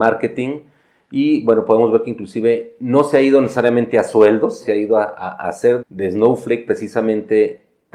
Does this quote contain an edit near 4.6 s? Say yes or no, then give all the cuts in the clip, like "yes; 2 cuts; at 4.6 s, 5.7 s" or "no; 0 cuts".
yes; 2 cuts; at 4.6 s, 5.8 s